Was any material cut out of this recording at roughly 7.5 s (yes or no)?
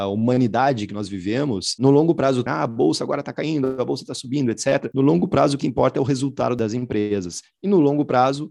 no